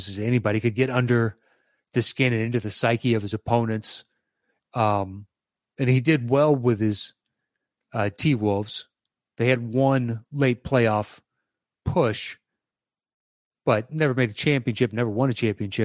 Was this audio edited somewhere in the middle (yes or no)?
yes